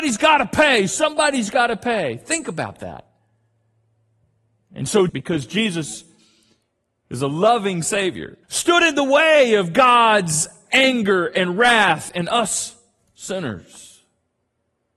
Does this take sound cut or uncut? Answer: cut